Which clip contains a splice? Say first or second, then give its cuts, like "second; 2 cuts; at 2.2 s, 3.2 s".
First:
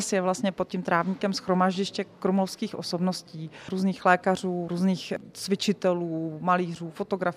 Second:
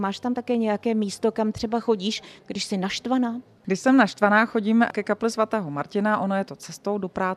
first; 1 cut; at 4.7 s